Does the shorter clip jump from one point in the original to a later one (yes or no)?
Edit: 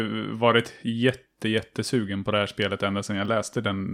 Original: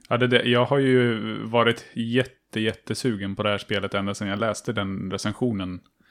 no